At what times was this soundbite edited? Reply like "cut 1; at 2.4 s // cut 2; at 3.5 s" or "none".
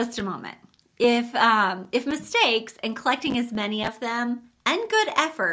none